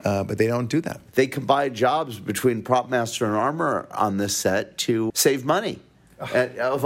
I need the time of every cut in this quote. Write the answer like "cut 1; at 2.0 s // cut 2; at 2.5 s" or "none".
cut 1; at 1.1 s // cut 2; at 5.1 s